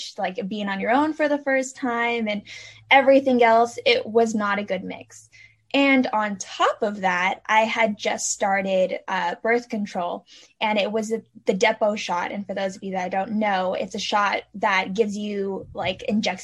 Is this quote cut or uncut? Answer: uncut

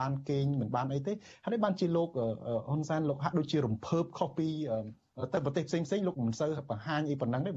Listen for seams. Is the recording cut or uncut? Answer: cut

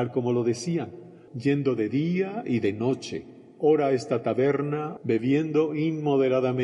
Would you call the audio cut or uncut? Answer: cut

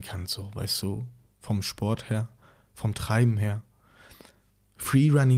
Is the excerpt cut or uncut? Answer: uncut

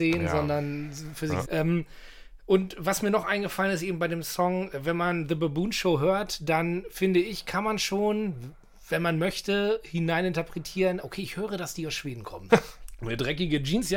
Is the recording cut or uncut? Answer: cut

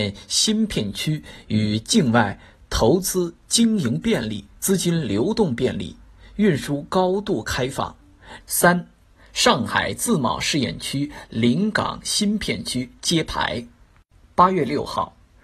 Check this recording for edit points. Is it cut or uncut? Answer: cut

